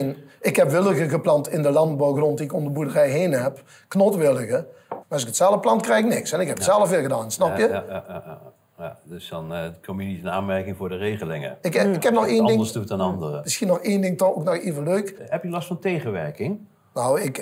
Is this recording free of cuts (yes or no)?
no